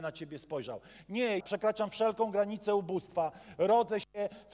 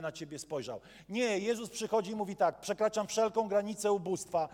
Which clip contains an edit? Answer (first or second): first